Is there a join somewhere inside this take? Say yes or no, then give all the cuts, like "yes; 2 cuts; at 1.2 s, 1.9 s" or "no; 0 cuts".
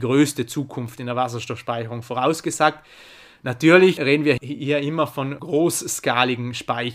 no; 0 cuts